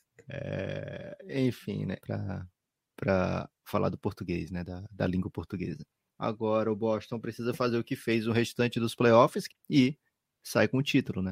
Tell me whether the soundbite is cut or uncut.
cut